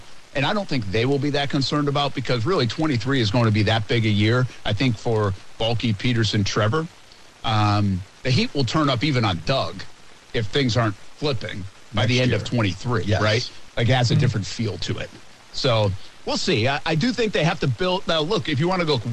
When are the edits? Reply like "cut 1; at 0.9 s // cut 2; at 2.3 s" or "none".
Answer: cut 1; at 13.7 s